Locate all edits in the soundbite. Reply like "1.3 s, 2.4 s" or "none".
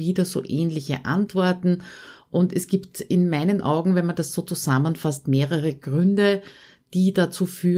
none